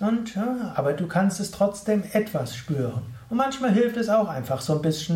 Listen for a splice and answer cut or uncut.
uncut